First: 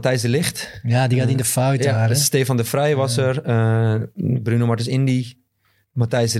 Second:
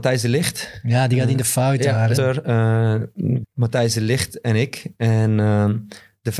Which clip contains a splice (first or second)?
second